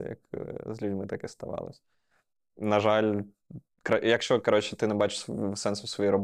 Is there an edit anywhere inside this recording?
no; 0 cuts

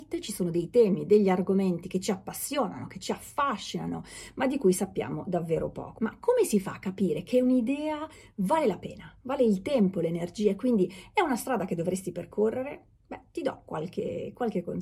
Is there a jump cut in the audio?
yes; 1 cut; at 6.0 s

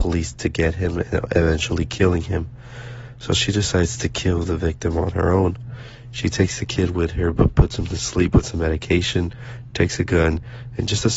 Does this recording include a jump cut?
no; 0 cuts

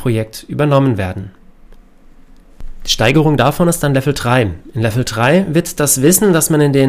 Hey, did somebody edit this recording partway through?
no; 0 cuts

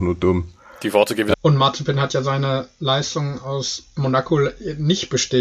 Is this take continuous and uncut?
no; 1 cut; at 1.3 s

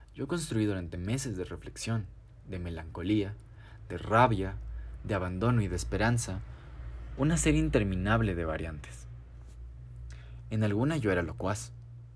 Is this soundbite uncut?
yes; 0 cuts

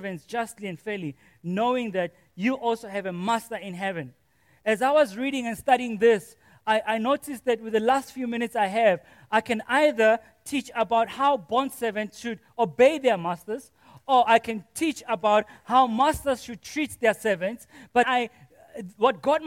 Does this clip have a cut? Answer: yes; 1 cut; at 18.0 s

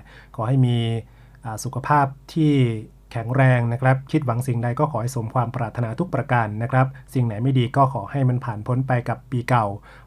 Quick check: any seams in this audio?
no; 0 cuts

